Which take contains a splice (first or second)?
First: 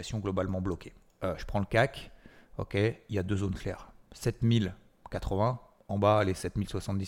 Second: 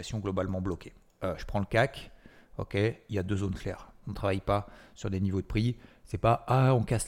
second